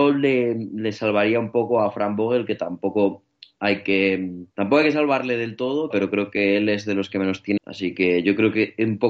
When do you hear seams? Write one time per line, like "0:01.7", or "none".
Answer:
0:04.5
0:05.9
0:07.6